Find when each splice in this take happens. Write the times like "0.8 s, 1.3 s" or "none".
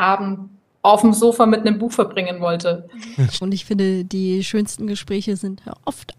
3.4 s